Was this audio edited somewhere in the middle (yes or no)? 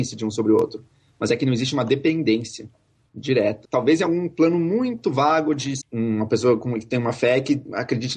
yes